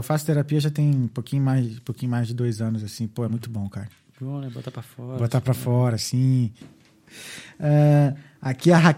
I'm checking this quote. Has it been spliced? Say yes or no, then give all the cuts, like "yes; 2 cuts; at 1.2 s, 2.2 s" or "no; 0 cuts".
yes; 1 cut; at 6.6 s